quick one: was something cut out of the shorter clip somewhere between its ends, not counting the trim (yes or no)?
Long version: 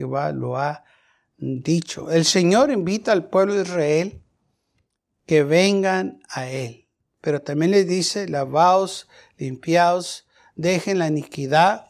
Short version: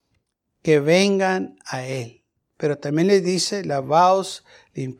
no